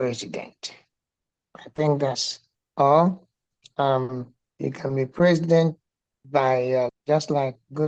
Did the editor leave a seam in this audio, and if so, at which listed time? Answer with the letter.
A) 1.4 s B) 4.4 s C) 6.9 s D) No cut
C